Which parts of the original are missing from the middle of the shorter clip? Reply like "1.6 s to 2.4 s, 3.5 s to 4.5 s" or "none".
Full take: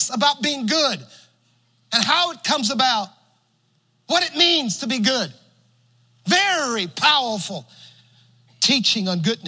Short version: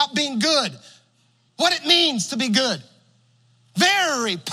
1.8 s to 4.0 s